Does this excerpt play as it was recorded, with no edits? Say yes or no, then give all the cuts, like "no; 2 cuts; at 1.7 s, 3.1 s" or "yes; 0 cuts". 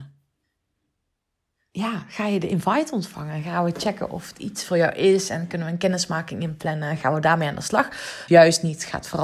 no; 1 cut; at 8.3 s